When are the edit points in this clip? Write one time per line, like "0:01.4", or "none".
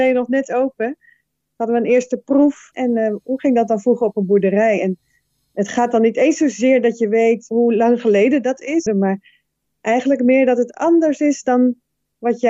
0:02.7
0:08.9